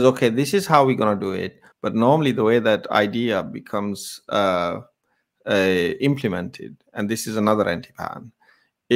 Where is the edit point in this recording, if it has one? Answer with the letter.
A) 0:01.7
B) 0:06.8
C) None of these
A